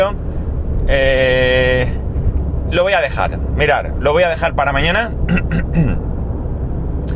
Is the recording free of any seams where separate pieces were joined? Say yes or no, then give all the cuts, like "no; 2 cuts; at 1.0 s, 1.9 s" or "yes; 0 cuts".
yes; 0 cuts